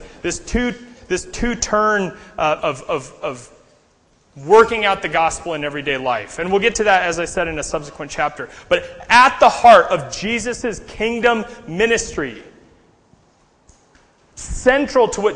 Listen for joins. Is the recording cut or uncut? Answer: cut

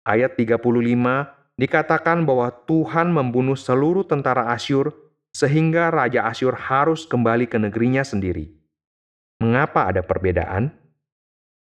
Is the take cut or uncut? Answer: uncut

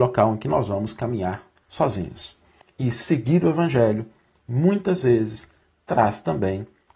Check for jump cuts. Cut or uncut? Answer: cut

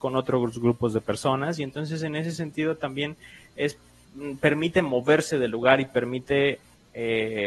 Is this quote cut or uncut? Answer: uncut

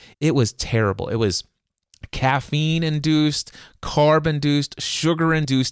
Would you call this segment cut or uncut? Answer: uncut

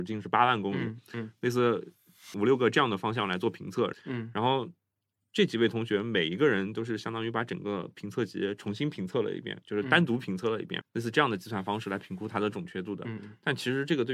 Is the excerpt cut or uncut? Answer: cut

